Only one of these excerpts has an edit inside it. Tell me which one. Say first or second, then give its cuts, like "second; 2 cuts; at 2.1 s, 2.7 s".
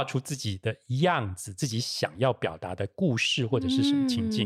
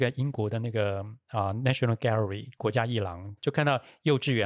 second; 1 cut; at 3.4 s